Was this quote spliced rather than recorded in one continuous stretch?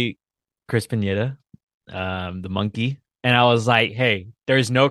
yes; 1 cut; at 3.1 s

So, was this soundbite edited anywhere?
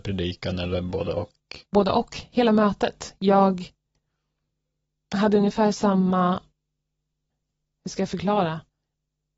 yes; 1 cut; at 1.7 s

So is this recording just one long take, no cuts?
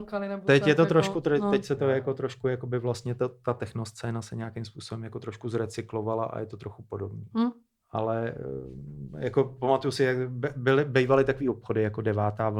yes; 0 cuts

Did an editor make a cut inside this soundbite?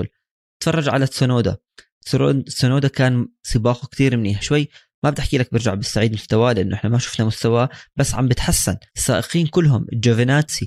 yes; 2 cuts; at 4.4 s, 8.9 s

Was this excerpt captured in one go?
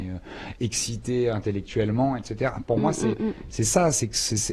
yes; 0 cuts

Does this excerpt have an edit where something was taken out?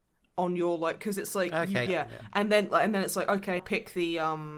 yes; 2 cuts; at 1.9 s, 3.6 s

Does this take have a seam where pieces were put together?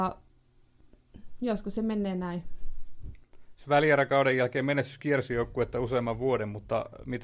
no; 0 cuts

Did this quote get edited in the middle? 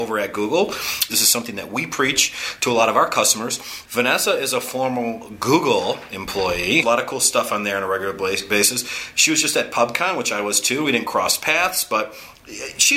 yes; 3 cuts; at 1.1 s, 3.8 s, 6.8 s

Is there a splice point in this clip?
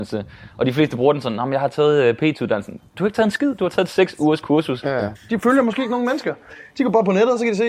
yes; 1 cut; at 5.2 s

